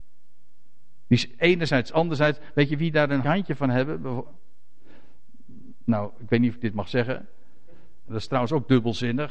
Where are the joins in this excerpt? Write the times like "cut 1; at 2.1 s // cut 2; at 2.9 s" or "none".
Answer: cut 1; at 3.2 s // cut 2; at 8.1 s